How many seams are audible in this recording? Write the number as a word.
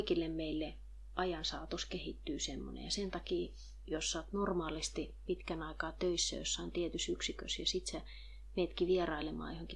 zero